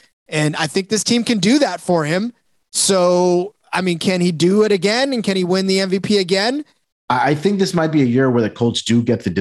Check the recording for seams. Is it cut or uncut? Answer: cut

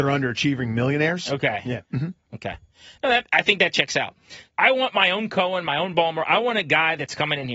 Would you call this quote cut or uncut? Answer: cut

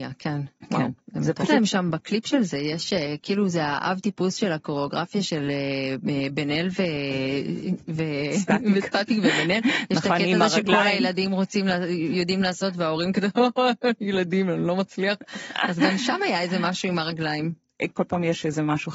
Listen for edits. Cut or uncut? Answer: cut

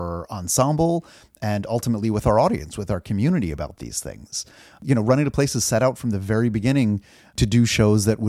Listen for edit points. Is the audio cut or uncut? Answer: uncut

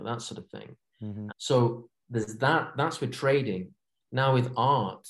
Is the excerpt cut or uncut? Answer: cut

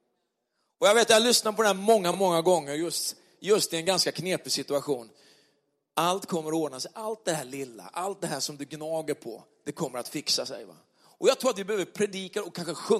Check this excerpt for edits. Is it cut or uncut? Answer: uncut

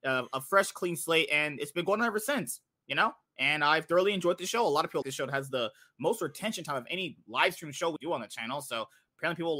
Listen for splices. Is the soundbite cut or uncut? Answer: cut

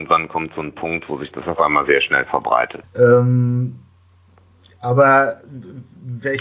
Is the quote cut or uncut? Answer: cut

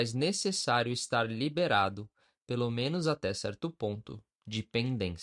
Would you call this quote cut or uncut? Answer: uncut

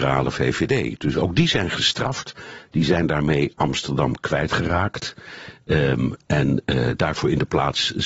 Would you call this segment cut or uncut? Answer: uncut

